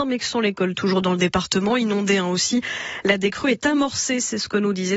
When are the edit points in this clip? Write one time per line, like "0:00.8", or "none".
none